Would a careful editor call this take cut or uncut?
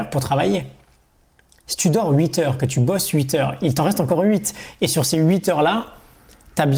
uncut